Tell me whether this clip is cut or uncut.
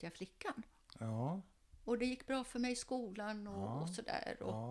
uncut